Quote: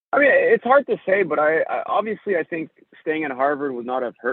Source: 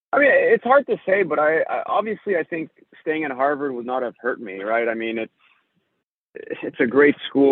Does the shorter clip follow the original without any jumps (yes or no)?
yes